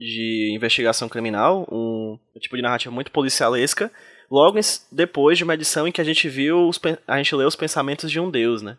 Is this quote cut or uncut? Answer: uncut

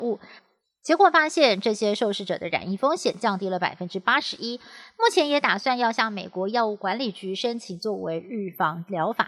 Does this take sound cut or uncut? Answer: uncut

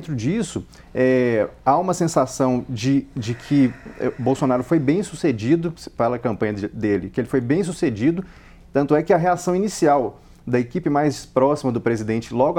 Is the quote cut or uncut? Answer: uncut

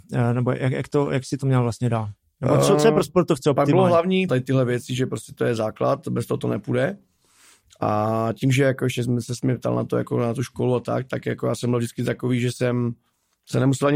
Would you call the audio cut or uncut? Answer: cut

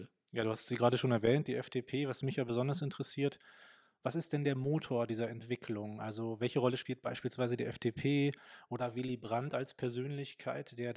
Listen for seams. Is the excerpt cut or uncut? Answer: uncut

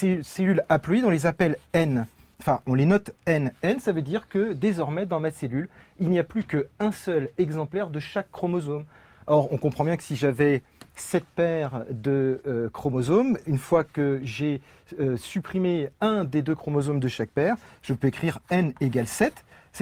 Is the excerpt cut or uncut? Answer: uncut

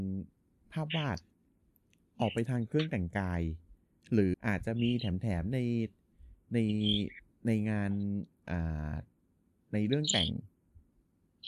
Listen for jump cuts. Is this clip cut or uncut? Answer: cut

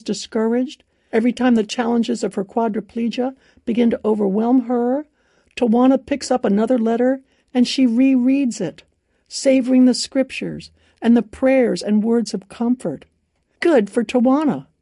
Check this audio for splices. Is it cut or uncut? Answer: uncut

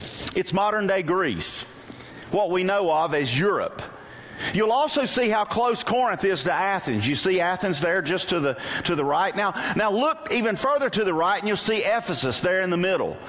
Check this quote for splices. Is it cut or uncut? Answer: uncut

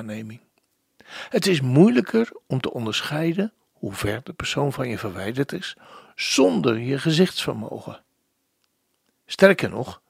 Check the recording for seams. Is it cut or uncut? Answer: uncut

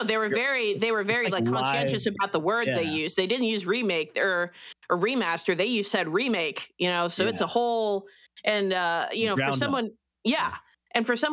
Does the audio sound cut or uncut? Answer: uncut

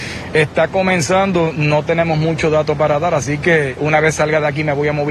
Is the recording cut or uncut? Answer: cut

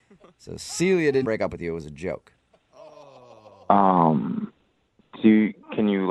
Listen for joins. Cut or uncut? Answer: cut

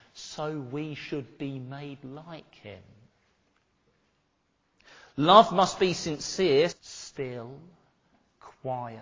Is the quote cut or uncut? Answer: cut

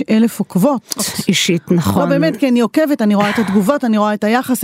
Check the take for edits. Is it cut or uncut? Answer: cut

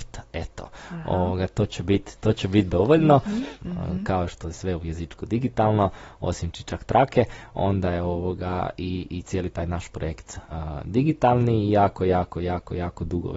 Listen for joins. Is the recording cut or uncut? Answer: cut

